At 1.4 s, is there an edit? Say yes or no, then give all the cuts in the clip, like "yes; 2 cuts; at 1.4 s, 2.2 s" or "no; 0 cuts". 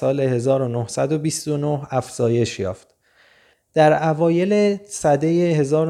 no; 1 cut; at 3.5 s